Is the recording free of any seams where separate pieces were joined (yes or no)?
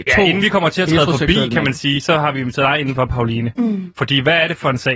yes